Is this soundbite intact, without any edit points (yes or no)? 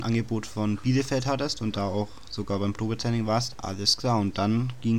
no